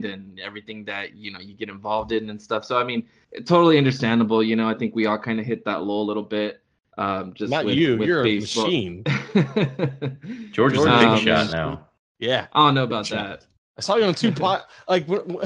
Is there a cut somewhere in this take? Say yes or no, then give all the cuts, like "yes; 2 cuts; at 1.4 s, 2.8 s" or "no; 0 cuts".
no; 0 cuts